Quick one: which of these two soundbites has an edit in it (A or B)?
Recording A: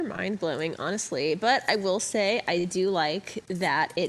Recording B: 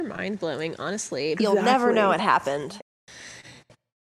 B